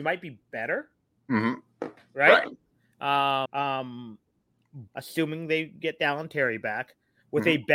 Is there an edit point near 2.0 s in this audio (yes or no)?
no